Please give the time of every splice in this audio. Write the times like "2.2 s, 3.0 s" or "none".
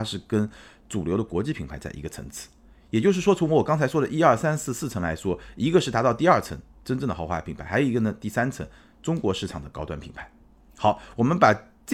none